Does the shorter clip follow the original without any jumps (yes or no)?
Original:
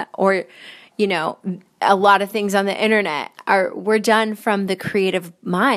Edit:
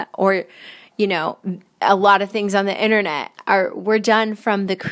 yes